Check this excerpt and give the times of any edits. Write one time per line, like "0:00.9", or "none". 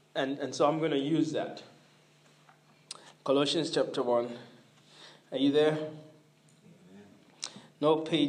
none